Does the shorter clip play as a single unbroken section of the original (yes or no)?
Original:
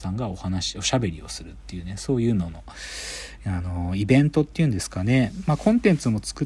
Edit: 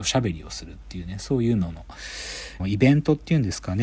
no